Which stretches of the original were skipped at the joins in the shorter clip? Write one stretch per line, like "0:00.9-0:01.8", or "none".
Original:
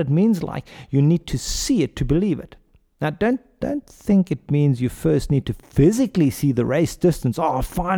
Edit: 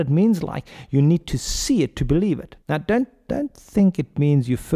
0:02.6-0:02.9